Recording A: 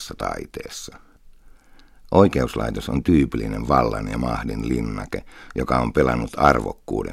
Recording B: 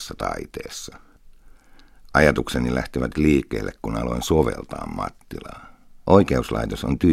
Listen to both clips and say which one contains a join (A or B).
B